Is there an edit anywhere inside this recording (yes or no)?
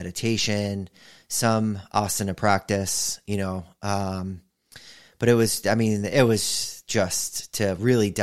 no